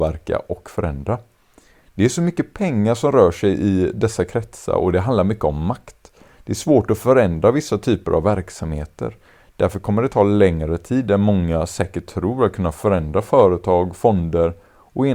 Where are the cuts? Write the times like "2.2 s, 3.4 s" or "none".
none